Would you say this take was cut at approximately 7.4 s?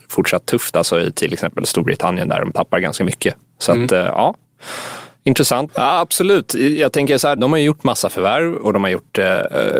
yes; 2 cuts; at 5.7 s, 7.4 s

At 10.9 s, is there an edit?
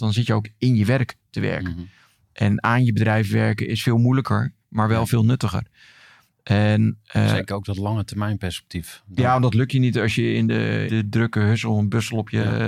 yes; 1 cut; at 10.9 s

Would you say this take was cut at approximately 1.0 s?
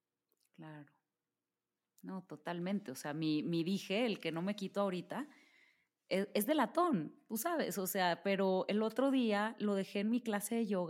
no; 0 cuts

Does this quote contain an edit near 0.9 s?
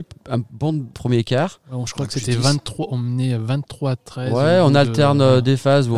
yes; 1 cut; at 0.9 s

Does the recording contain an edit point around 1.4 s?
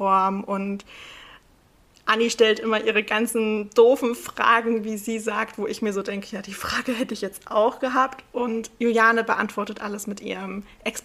no; 0 cuts

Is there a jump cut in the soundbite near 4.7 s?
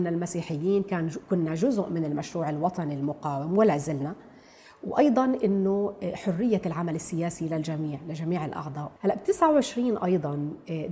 no; 1 cut; at 9.0 s

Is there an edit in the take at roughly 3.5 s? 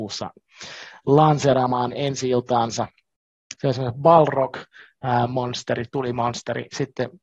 yes; 1 cut; at 3.5 s

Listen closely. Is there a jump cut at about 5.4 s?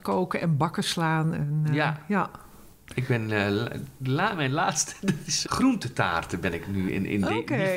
yes; 1 cut; at 5.4 s

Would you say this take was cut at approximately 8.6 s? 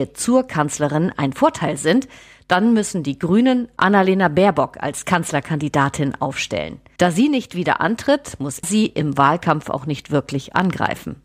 yes; 2 cuts; at 7.0 s, 8.6 s

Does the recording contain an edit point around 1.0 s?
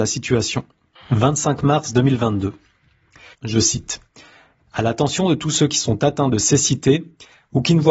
yes; 2 cuts; at 1.0 s, 3.3 s

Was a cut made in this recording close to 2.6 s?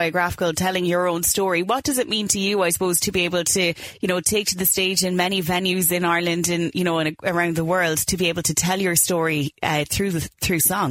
no; 0 cuts

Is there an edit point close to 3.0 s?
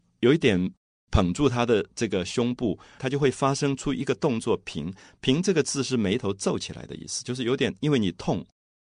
yes; 1 cut; at 3.0 s

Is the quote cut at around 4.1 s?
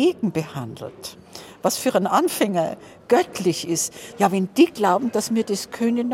yes; 1 cut; at 4.1 s

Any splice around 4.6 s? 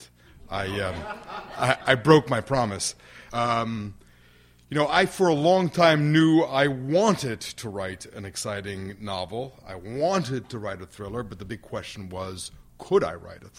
no; 1 cut; at 3.3 s

